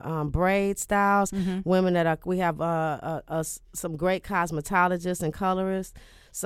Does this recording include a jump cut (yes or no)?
no